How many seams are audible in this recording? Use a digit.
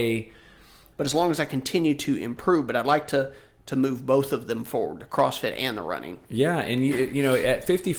1